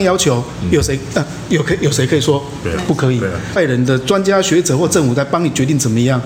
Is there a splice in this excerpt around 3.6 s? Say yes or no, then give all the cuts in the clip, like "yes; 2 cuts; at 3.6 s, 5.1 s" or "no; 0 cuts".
yes; 1 cut; at 3.6 s